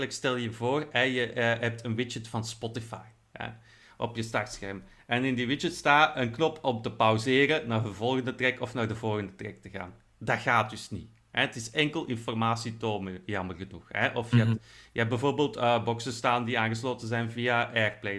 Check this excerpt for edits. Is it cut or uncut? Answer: uncut